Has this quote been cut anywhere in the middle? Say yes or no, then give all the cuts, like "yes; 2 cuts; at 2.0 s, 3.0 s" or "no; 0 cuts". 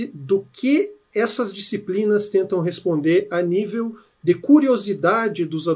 no; 0 cuts